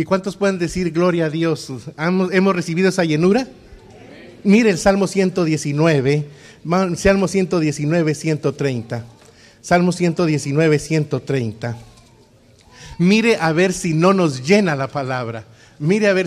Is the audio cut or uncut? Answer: uncut